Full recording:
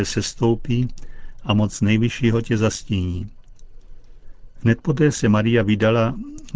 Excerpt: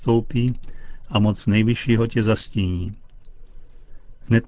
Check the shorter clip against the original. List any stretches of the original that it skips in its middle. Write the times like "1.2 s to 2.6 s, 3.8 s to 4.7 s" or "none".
none